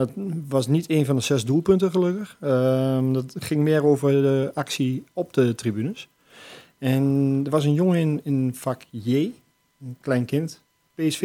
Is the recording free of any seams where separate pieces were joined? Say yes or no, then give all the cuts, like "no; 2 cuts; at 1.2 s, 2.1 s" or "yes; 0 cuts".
yes; 0 cuts